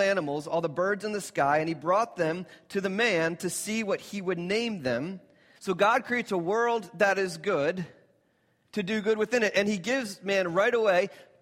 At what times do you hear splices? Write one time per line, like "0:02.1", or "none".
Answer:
0:05.5
0:08.6